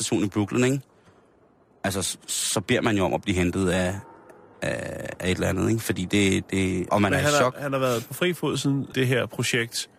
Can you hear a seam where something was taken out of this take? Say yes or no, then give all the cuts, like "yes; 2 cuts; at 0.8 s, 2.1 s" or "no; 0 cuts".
yes; 2 cuts; at 6.9 s, 8.9 s